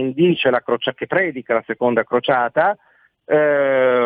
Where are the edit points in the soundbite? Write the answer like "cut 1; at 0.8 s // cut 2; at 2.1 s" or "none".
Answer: none